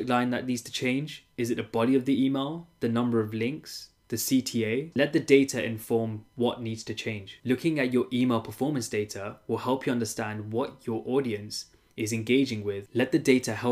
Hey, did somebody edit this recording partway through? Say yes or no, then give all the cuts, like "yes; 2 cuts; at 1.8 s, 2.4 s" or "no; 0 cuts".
yes; 2 cuts; at 4.9 s, 7.4 s